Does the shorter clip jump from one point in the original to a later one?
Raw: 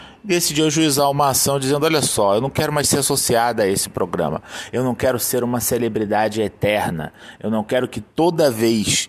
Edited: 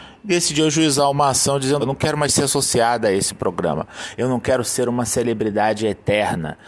yes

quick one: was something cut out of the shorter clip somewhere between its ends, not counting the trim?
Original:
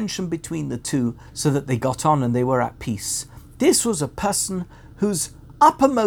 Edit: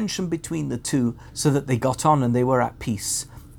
no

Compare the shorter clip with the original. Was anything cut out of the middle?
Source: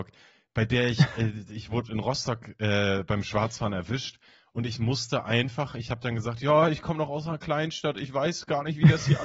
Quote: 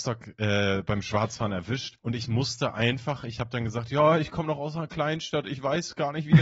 yes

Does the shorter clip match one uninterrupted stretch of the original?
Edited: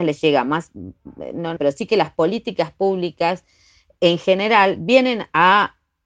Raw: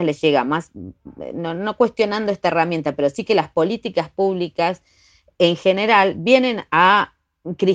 no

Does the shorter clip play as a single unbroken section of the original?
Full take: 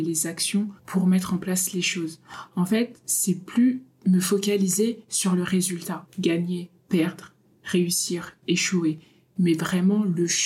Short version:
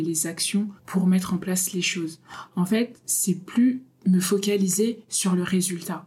yes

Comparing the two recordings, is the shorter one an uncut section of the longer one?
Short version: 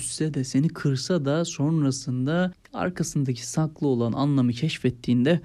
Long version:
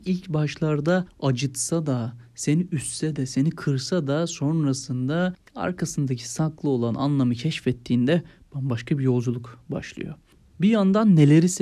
yes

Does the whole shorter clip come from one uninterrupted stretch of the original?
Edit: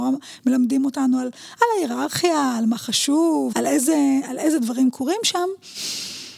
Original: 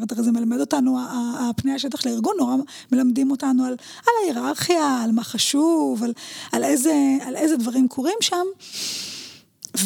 no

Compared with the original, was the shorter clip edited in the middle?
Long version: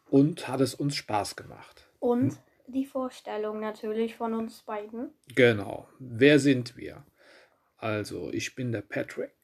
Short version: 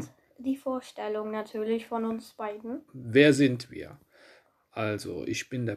yes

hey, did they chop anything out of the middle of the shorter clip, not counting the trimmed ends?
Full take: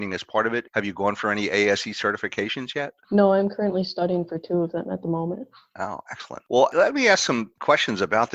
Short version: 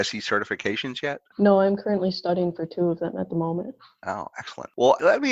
no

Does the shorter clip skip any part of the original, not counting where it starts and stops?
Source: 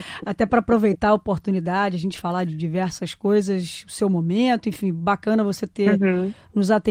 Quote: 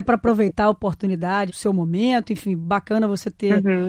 yes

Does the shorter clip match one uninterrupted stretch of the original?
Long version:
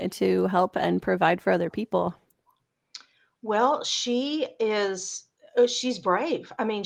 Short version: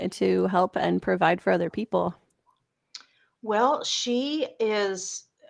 yes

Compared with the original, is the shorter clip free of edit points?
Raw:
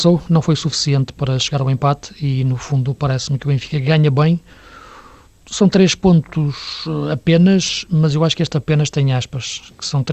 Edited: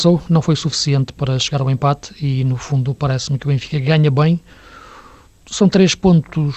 yes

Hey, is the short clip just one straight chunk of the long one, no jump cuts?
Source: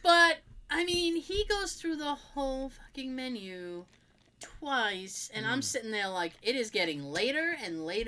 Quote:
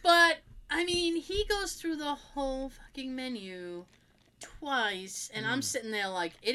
yes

